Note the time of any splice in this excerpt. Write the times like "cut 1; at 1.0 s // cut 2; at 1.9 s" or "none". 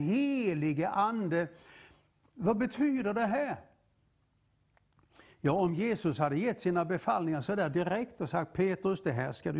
none